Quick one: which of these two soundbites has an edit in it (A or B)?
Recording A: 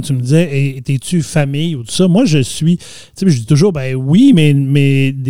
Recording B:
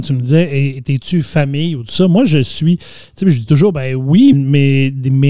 B